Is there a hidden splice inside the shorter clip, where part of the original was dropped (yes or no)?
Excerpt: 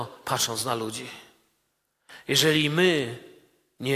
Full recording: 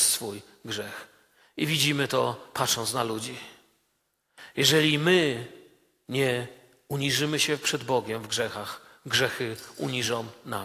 no